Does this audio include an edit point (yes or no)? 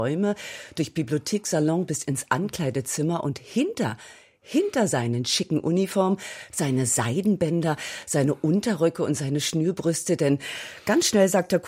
yes